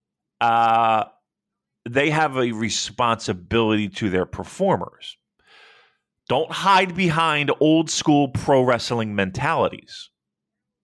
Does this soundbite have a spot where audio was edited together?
no; 0 cuts

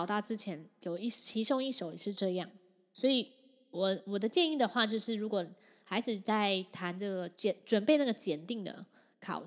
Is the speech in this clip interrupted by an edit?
no; 0 cuts

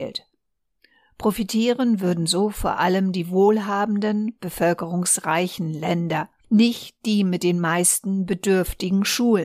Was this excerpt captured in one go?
no; 1 cut; at 6.4 s

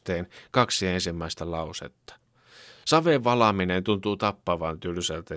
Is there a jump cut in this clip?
no; 0 cuts

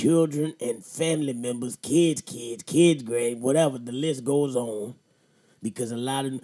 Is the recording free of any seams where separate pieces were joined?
yes; 0 cuts

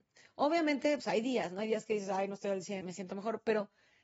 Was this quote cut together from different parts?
yes; 2 cuts; at 1.0 s, 2.8 s

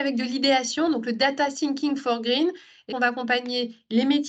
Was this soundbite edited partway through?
yes; 1 cut; at 2.9 s

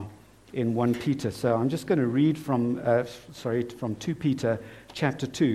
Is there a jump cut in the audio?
no; 0 cuts

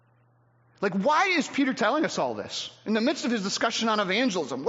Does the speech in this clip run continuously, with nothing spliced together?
yes; 0 cuts

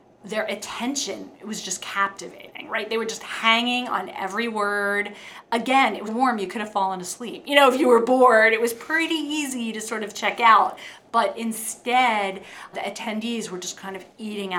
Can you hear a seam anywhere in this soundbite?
yes; 2 cuts; at 6.1 s, 12.7 s

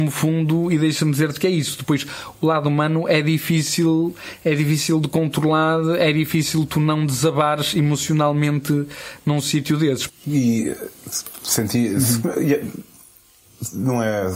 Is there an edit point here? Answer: yes; 1 cut; at 10.1 s

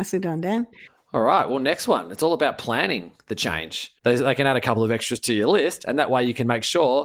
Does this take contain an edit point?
yes; 1 cut; at 4.0 s

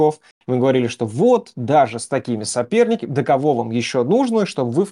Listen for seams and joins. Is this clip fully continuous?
yes; 0 cuts

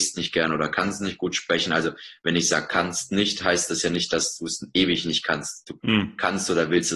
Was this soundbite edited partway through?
no; 0 cuts

